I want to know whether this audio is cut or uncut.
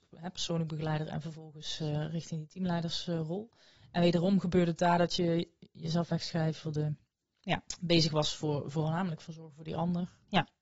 uncut